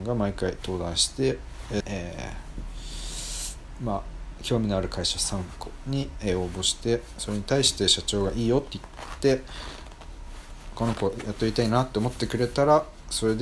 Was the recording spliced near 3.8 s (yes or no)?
no